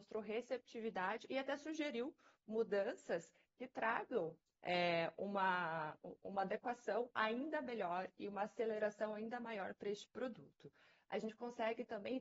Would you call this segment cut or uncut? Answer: uncut